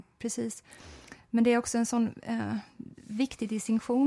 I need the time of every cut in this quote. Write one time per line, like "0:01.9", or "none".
none